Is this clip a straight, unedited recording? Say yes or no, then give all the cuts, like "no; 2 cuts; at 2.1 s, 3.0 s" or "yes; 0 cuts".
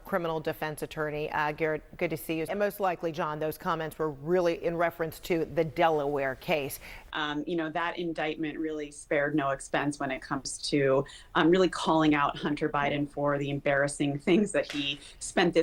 no; 2 cuts; at 2.5 s, 7.1 s